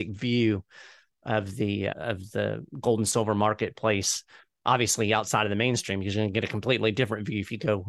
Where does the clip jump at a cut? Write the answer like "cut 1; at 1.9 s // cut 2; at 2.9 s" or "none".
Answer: cut 1; at 1.9 s